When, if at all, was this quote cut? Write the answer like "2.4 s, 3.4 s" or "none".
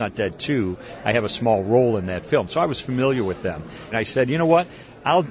3.9 s